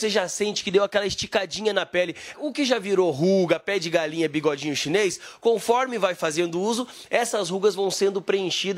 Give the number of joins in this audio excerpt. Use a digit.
1